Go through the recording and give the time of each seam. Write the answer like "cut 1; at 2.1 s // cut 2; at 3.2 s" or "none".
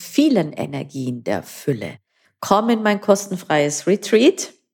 cut 1; at 2.2 s